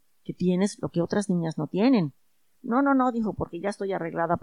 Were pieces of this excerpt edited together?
yes; 1 cut; at 2.5 s

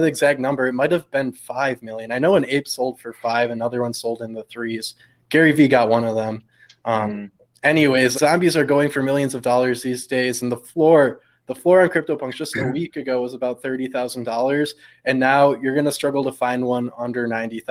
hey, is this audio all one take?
no; 1 cut; at 8.1 s

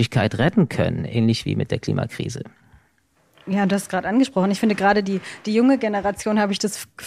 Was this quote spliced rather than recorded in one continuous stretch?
no; 0 cuts

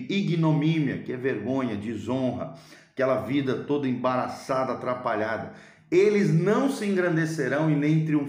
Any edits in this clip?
no; 0 cuts

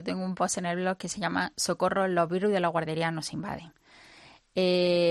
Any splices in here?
no; 0 cuts

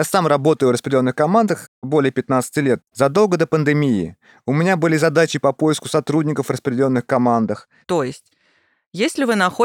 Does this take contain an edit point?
yes; 2 cuts; at 2.9 s, 7.8 s

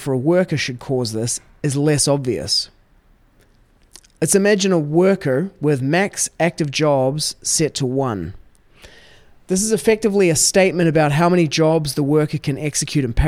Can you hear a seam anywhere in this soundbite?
no; 0 cuts

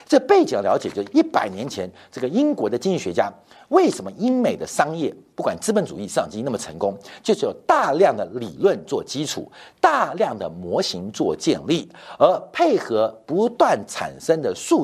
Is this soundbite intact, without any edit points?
yes; 0 cuts

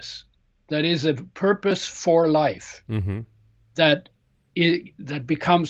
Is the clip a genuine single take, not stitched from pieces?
yes; 0 cuts

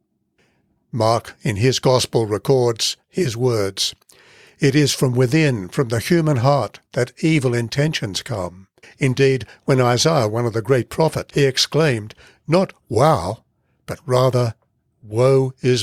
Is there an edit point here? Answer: yes; 2 cuts; at 8.8 s, 11.3 s

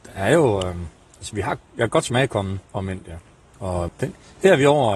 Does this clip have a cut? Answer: yes; 2 cuts; at 2.6 s, 3.9 s

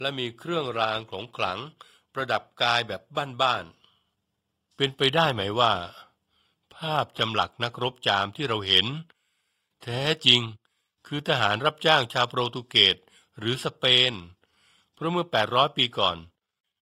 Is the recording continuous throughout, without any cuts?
yes; 0 cuts

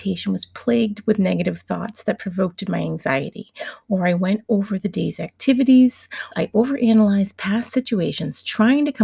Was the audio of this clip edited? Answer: yes; 1 cut; at 6.3 s

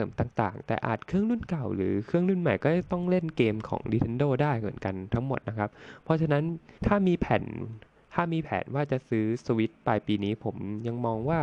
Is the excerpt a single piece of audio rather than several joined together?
no; 1 cut; at 6.8 s

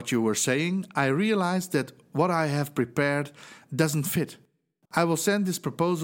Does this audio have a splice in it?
yes; 1 cut; at 4.9 s

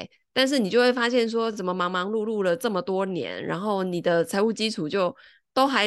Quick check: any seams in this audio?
no; 0 cuts

